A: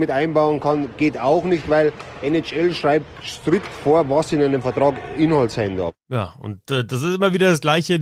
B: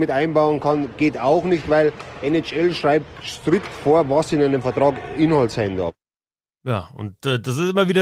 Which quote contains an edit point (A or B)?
A